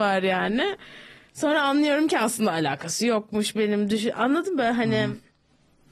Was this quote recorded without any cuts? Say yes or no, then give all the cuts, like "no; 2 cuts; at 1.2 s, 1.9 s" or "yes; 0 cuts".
yes; 0 cuts